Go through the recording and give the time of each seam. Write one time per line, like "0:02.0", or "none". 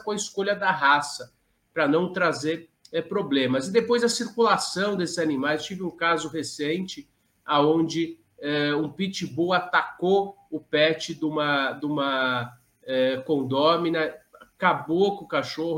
none

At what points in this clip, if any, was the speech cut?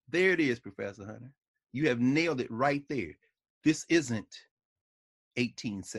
none

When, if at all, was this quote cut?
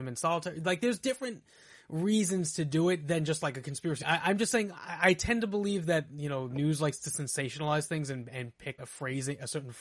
0:04.0
0:08.8

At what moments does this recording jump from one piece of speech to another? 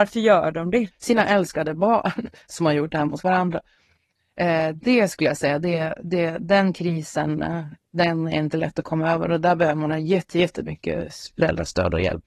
0:00.9

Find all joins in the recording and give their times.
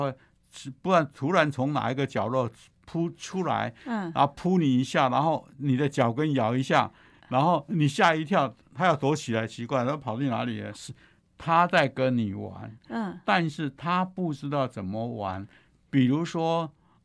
0:10.7

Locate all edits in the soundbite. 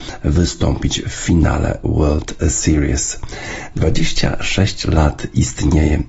none

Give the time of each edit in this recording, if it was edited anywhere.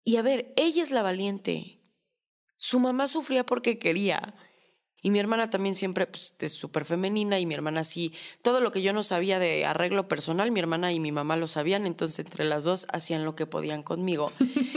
0:05.0

